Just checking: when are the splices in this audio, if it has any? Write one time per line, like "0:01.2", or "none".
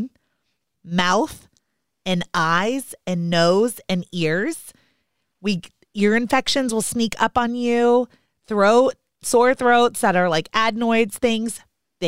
none